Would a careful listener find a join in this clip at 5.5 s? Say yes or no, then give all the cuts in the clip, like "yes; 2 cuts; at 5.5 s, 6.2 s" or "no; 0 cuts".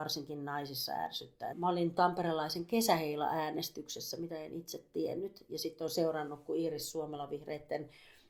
no; 1 cut; at 1.5 s